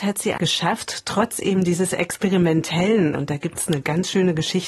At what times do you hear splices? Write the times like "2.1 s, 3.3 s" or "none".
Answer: 3.1 s